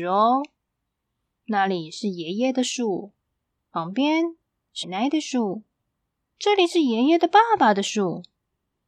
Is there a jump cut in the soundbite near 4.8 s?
yes; 1 cut; at 4.8 s

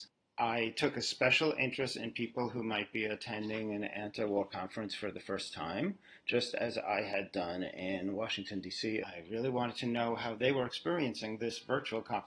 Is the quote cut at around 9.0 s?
yes; 1 cut; at 9.0 s

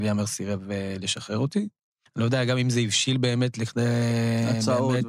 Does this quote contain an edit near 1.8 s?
no; 0 cuts

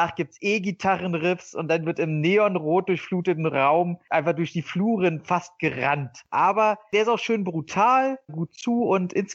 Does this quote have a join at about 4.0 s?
no; 2 cuts; at 6.3 s, 8.3 s

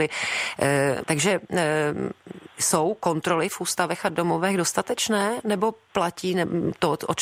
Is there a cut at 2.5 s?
no; 1 cut; at 1.0 s

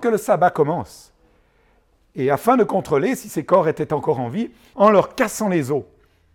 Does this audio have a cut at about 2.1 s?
no; 1 cut; at 4.7 s

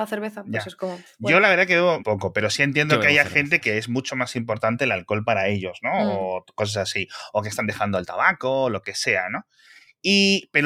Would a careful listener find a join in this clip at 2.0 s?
yes; 1 cut; at 2.0 s

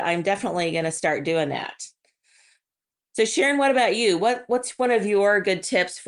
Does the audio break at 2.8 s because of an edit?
no; 0 cuts

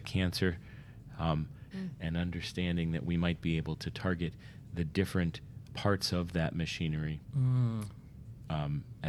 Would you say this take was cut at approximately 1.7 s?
yes; 2 cuts; at 1.7 s, 5.7 s

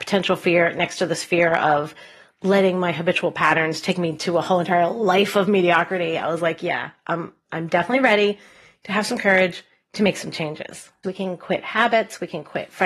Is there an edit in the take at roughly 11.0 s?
yes; 1 cut; at 11.0 s

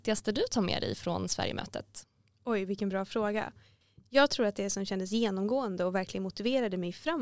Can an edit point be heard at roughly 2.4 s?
no; 0 cuts

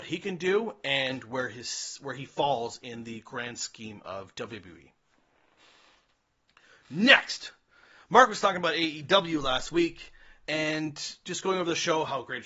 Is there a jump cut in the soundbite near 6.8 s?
no; 1 cut; at 10.5 s

